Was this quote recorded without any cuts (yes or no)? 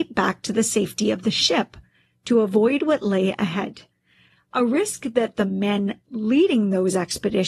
yes